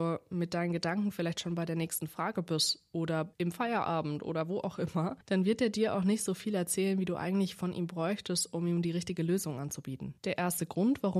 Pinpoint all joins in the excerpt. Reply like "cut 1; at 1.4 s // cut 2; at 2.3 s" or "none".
none